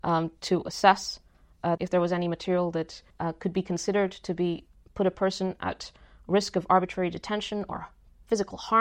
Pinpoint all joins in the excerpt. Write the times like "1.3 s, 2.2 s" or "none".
1.8 s, 3.1 s